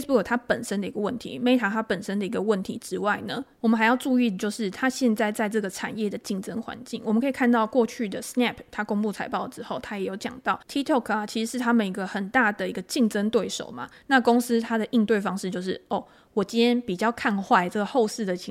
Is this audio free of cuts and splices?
no; 2 cuts; at 3.5 s, 14.0 s

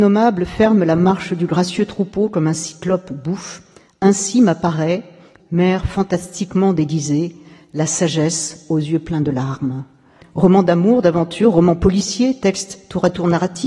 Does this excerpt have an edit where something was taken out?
yes; 2 cuts; at 5.4 s, 10.2 s

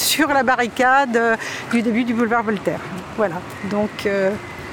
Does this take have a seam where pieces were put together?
no; 0 cuts

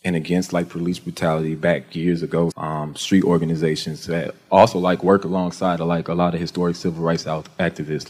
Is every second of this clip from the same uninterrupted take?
no; 1 cut; at 2.5 s

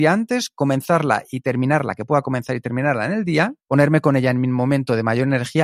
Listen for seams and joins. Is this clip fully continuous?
no; 1 cut; at 3.6 s

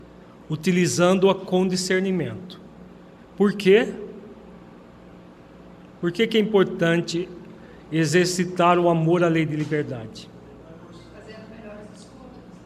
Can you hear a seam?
no; 0 cuts

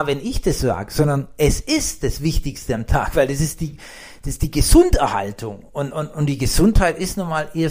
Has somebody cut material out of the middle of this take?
no; 0 cuts

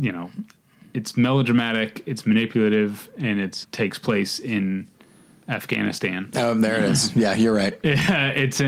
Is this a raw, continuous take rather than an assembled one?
no; 1 cut; at 3.6 s

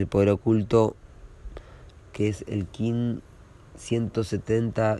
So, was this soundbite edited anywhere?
yes; 1 cut; at 2.1 s

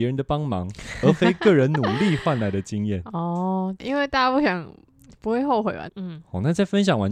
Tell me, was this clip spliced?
yes; 2 cuts; at 3.8 s, 5.9 s

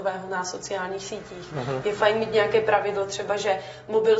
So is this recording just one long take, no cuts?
yes; 0 cuts

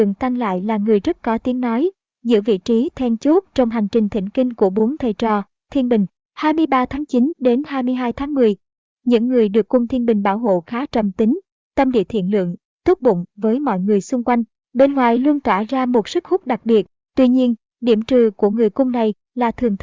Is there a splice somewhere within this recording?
no; 0 cuts

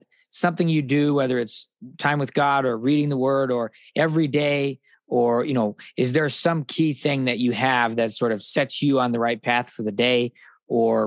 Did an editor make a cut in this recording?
no; 0 cuts

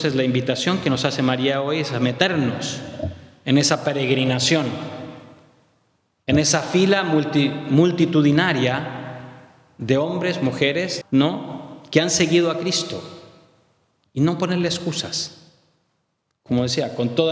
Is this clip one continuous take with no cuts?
no; 1 cut; at 11.0 s

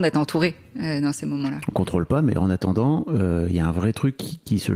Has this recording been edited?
no; 0 cuts

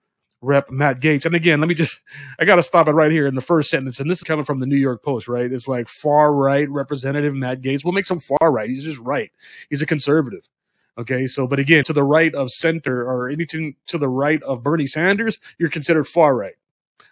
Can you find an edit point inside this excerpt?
yes; 2 cuts; at 4.2 s, 11.8 s

